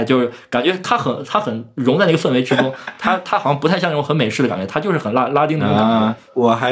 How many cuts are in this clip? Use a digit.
0